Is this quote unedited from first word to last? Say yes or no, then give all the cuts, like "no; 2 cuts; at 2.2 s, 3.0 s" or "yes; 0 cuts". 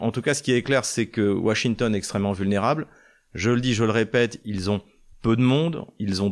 yes; 0 cuts